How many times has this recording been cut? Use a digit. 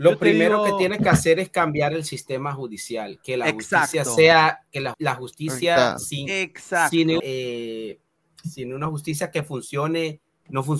2